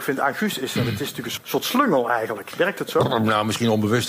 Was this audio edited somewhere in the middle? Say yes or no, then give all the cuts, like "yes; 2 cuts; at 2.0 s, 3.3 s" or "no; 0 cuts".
yes; 2 cuts; at 1.4 s, 2.5 s